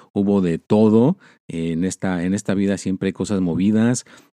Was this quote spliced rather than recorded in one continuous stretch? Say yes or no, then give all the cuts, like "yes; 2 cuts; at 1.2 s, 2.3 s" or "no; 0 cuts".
no; 0 cuts